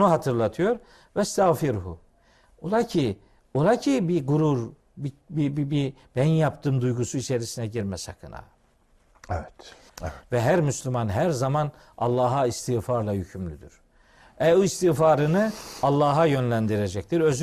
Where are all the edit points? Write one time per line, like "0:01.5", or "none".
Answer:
0:09.9